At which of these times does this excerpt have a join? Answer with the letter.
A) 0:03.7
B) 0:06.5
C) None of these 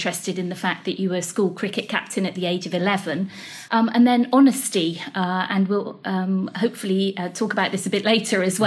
A